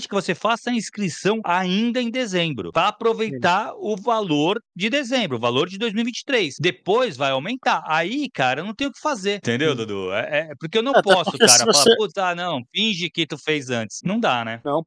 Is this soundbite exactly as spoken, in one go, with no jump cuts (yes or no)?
yes